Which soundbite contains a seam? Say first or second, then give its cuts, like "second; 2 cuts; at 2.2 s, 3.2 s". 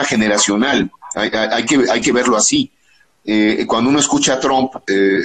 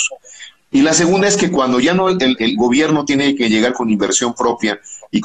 second; 1 cut; at 2.4 s